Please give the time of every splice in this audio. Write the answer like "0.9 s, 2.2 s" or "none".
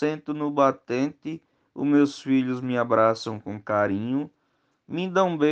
none